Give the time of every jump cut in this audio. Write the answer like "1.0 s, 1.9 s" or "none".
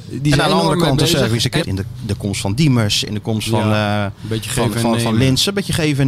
1.6 s